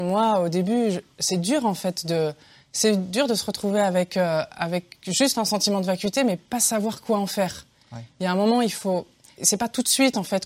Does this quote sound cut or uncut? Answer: cut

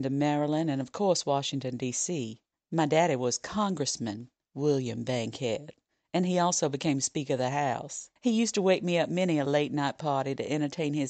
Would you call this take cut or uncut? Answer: uncut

